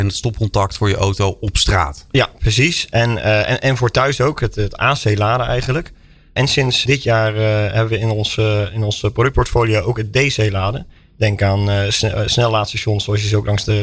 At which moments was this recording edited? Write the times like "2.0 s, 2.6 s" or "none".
none